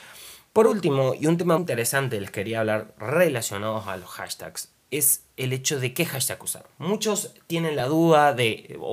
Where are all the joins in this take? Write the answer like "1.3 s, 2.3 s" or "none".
1.6 s